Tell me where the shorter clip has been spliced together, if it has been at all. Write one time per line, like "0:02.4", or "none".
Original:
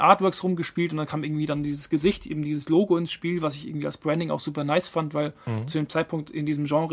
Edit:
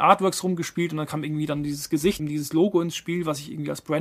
0:02.2